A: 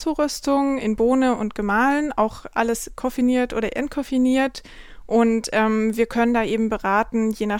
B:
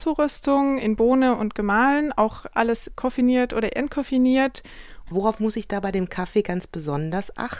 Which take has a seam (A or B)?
B